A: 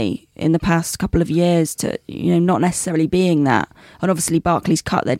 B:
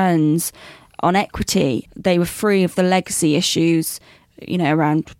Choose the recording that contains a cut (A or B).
B